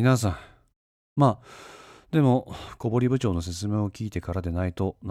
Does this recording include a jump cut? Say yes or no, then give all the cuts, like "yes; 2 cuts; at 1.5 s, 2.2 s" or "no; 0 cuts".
yes; 1 cut; at 1.1 s